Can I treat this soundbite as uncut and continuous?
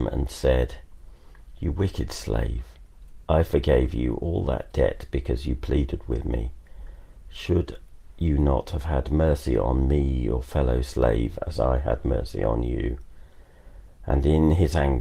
yes; 0 cuts

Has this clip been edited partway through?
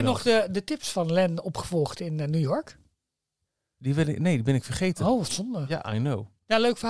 no; 0 cuts

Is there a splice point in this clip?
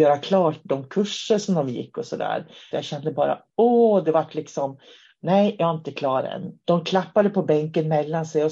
yes; 2 cuts; at 2.7 s, 6.6 s

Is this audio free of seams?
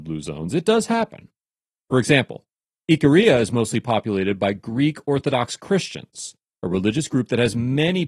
yes; 0 cuts

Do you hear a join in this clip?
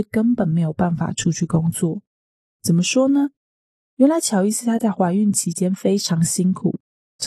no; 0 cuts

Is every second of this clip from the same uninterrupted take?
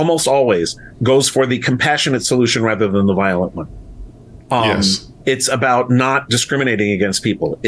no; 2 cuts; at 0.9 s, 5.2 s

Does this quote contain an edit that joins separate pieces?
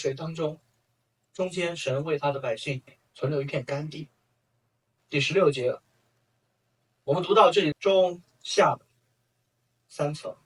yes; 2 cuts; at 5.0 s, 7.7 s

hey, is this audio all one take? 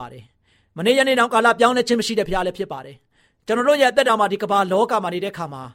yes; 0 cuts

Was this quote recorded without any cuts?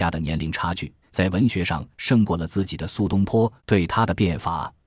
no; 2 cuts; at 1.0 s, 3.6 s

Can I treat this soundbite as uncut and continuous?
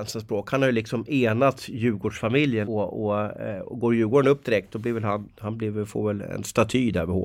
no; 2 cuts; at 2.7 s, 5.3 s

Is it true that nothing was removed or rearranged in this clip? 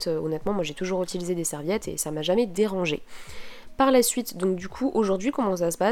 yes; 0 cuts

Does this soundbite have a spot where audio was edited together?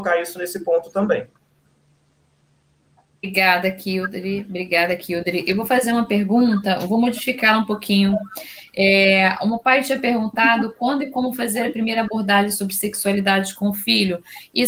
no; 0 cuts

